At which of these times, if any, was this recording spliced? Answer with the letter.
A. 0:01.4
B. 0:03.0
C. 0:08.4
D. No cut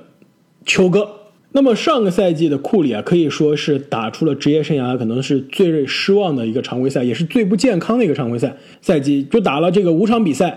A